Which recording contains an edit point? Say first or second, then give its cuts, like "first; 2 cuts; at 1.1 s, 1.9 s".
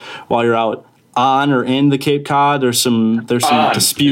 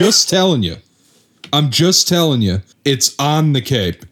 second; 1 cut; at 2.7 s